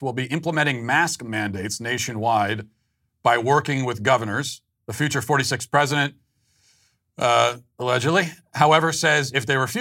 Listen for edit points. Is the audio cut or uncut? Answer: uncut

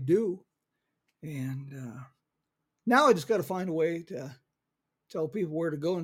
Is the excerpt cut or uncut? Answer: uncut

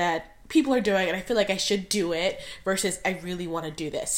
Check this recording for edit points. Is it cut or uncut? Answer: uncut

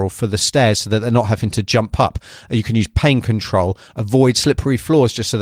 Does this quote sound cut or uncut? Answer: uncut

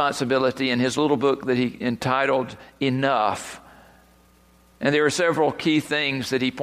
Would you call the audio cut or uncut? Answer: uncut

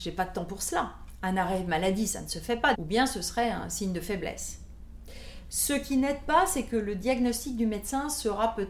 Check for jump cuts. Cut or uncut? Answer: cut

